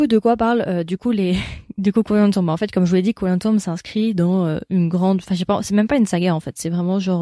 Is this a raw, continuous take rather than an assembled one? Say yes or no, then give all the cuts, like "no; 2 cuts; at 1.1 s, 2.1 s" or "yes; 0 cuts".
yes; 0 cuts